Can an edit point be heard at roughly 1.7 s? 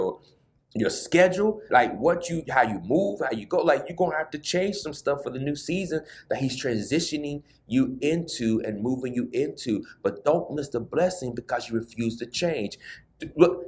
yes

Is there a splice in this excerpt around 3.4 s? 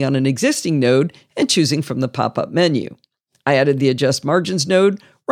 no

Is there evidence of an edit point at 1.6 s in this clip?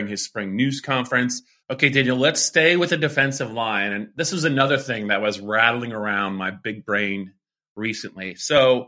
yes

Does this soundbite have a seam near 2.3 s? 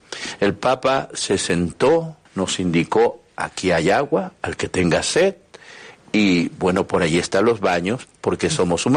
yes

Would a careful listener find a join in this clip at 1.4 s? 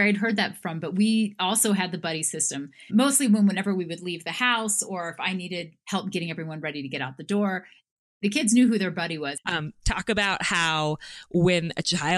no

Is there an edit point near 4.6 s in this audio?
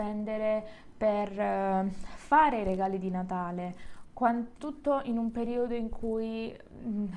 yes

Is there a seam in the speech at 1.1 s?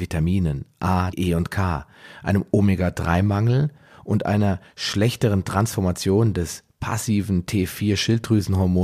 yes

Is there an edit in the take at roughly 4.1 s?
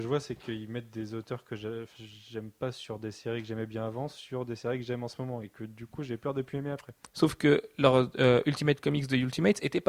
no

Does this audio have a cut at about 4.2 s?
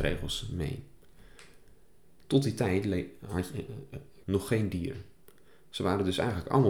yes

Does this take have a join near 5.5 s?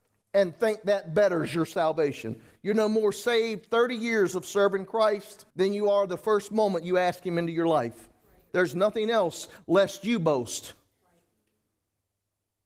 yes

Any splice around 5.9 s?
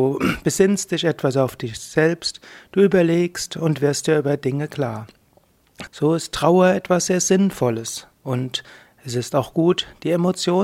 yes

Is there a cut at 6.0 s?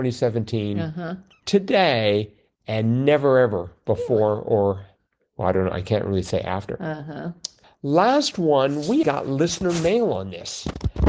no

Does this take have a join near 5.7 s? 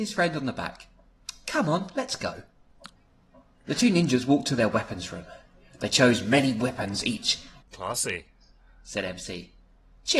no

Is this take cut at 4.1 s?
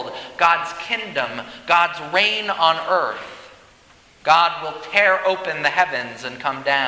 yes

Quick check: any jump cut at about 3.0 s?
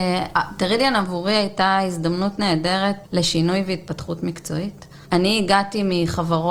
yes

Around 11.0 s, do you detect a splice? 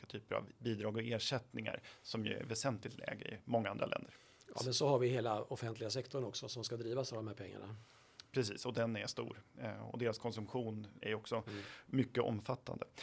yes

